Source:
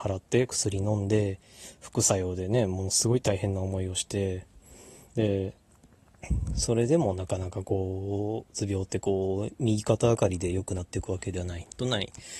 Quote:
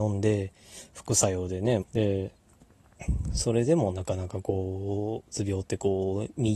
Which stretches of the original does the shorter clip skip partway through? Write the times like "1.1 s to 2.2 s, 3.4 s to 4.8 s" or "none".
2.7 s to 5.0 s